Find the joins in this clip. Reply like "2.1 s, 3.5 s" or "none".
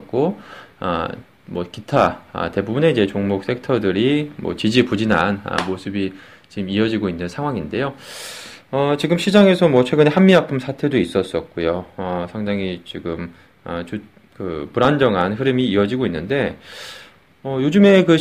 none